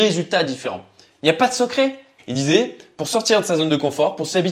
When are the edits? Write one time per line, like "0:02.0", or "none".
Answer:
0:02.2